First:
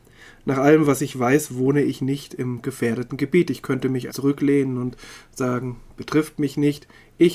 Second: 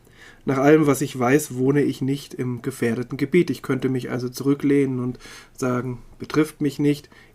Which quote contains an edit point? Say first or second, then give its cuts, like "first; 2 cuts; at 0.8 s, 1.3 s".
first; 1 cut; at 4.1 s